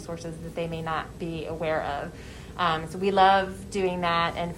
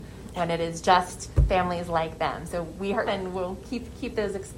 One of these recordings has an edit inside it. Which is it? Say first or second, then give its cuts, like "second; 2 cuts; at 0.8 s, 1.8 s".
second; 1 cut; at 3.1 s